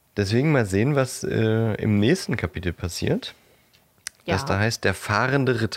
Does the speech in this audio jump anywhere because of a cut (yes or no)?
no